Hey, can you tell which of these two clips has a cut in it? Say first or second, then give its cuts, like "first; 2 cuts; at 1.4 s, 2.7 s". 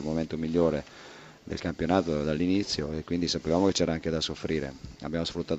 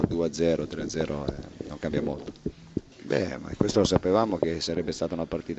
second; 1 cut; at 2.9 s